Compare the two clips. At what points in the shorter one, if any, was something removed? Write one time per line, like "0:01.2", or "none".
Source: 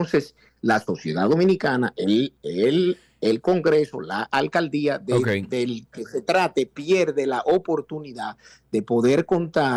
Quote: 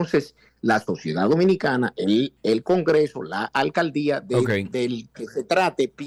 0:02.4